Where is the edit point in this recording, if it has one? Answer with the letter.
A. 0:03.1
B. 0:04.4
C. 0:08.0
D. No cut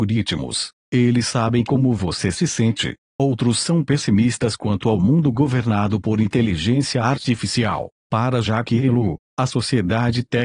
A